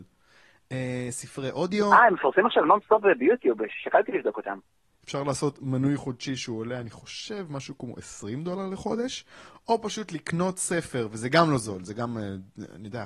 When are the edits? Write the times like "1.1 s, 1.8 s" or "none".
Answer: 4.9 s

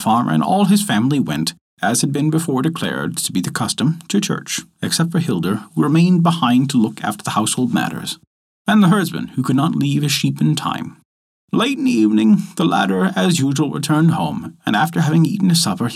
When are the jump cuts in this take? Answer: none

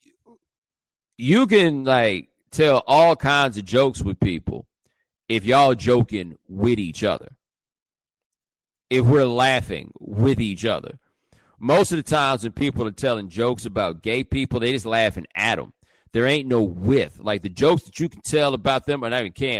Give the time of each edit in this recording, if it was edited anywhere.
none

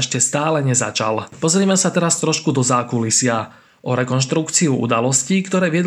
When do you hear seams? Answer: 1.3 s

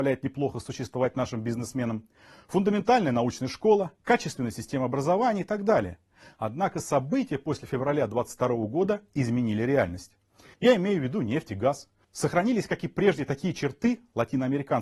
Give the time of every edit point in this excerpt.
10.5 s, 12.0 s

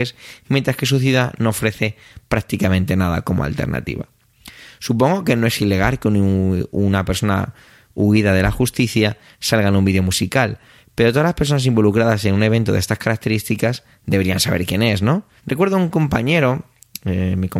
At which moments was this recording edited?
15.4 s

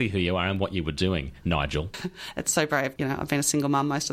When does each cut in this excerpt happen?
1.9 s, 3.0 s

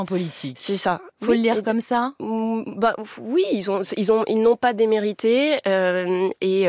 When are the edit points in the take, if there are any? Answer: 1.1 s

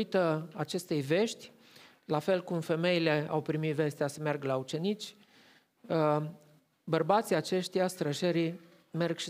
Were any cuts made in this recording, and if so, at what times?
none

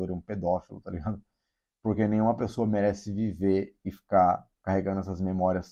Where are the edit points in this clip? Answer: none

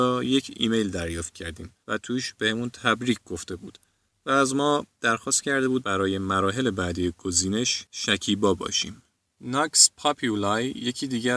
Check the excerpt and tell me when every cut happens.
none

